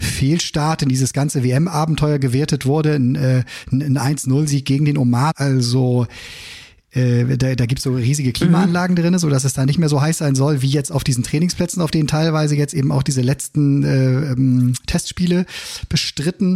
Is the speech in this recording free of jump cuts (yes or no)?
no